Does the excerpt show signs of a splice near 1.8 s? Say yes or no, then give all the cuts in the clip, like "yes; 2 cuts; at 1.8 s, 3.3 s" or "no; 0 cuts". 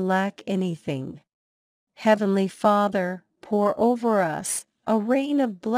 yes; 1 cut; at 1.8 s